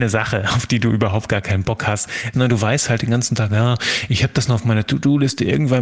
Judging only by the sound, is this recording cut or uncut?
cut